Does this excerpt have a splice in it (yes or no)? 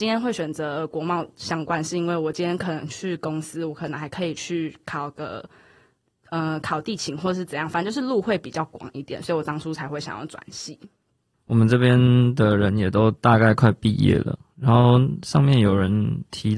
yes